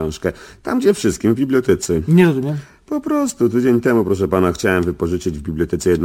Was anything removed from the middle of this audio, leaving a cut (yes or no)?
no